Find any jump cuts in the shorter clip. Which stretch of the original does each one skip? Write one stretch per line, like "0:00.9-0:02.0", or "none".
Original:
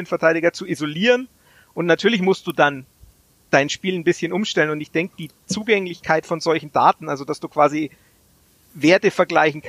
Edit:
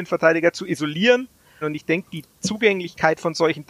0:01.6-0:04.7